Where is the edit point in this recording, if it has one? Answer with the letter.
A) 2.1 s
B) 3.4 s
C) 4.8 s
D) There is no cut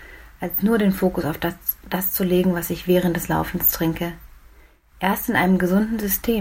D